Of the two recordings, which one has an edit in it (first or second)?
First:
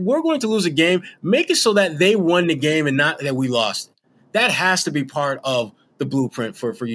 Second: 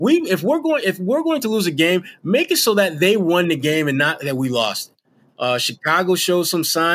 second